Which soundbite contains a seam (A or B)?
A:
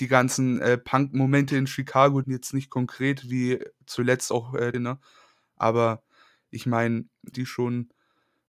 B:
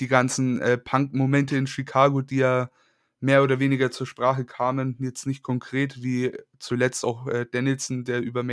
A